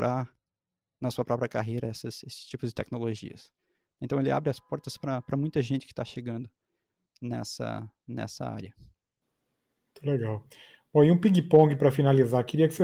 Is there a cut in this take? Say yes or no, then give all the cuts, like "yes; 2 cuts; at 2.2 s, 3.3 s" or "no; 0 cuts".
no; 0 cuts